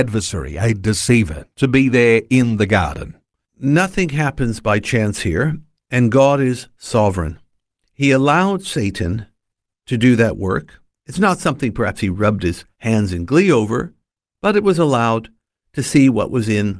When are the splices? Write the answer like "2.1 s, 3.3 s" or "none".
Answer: none